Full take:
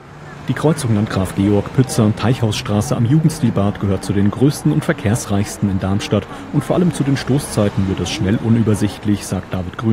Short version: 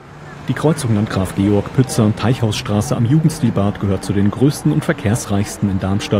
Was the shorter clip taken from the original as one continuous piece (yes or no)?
yes